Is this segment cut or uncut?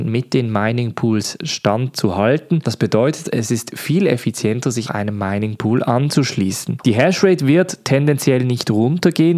cut